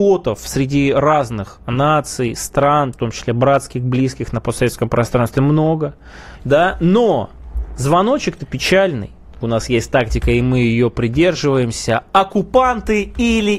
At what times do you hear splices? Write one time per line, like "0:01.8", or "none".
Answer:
0:02.9
0:06.4
0:09.4